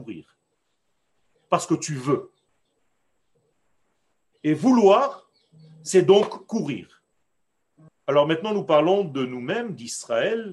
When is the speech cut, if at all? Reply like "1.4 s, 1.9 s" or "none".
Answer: 7.9 s